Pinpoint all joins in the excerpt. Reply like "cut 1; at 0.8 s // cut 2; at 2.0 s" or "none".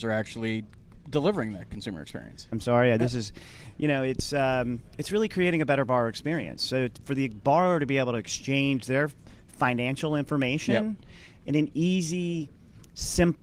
cut 1; at 2.5 s